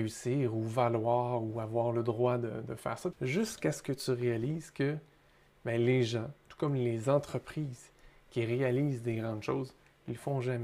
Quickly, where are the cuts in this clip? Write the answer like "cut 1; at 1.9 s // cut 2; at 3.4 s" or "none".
cut 1; at 3.1 s

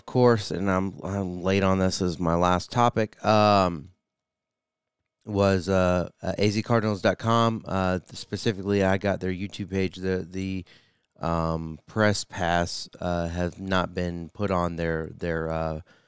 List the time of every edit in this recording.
none

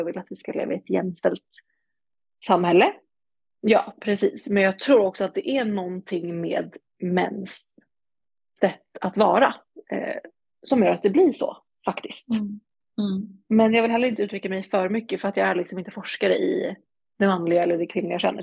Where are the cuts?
cut 1; at 3.6 s

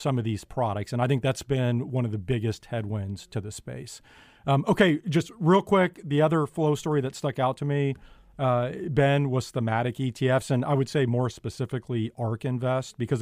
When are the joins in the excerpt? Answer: none

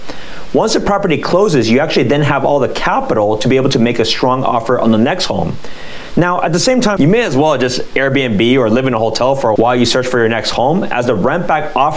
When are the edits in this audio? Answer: cut 1; at 7.0 s // cut 2; at 9.6 s

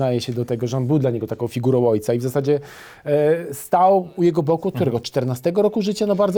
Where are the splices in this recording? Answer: none

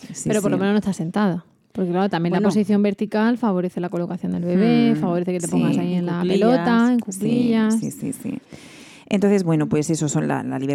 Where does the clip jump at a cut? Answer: none

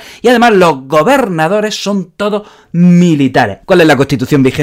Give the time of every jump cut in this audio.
cut 1; at 3.6 s

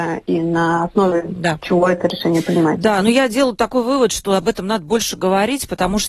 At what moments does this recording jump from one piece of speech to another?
none

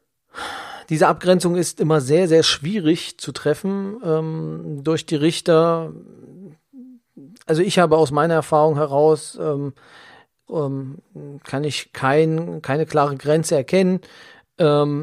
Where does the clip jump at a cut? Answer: cut 1; at 10.5 s

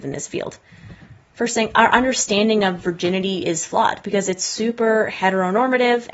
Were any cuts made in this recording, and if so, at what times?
none

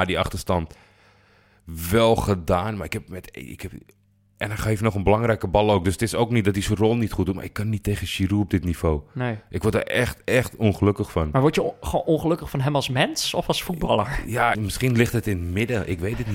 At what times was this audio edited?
cut 1; at 14.5 s

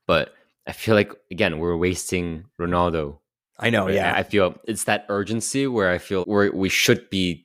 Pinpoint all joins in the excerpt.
cut 1; at 4.6 s // cut 2; at 6.2 s

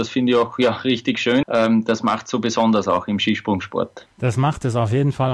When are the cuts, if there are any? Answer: cut 1; at 1.4 s

